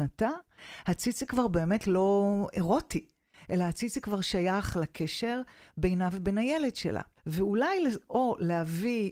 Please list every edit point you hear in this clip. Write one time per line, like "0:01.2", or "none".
0:07.2